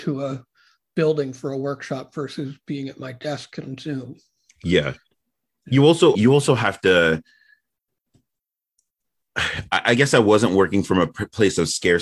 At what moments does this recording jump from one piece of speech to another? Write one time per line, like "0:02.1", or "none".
0:06.1

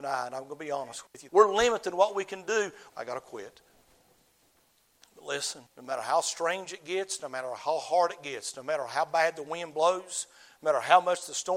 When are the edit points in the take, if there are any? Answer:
0:01.3
0:02.9
0:05.7

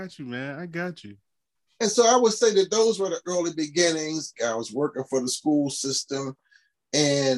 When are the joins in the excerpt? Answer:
0:04.4

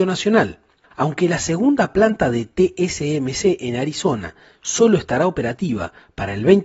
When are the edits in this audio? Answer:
0:00.9

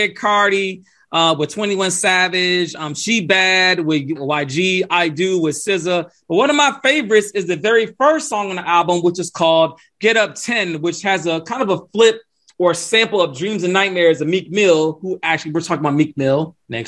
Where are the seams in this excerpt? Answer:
0:04.2

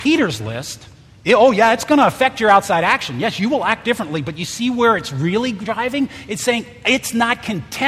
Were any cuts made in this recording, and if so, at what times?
none

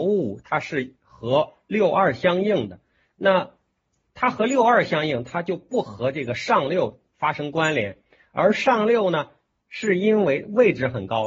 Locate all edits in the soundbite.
none

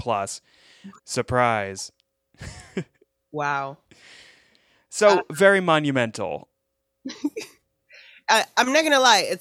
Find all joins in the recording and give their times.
0:01.0

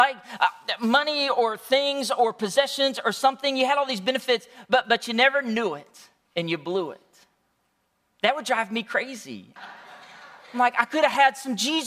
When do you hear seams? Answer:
0:09.6

